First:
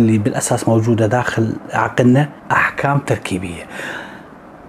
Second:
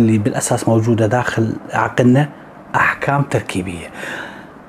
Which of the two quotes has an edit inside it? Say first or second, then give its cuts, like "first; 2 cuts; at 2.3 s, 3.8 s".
first; 1 cut; at 2.4 s